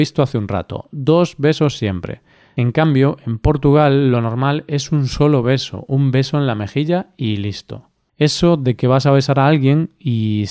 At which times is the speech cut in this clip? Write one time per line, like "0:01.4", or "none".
0:08.1